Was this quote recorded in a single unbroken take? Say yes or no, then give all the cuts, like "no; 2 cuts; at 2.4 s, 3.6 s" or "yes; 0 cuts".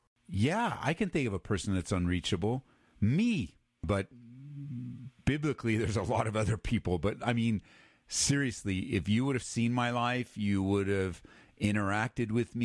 no; 1 cut; at 3.8 s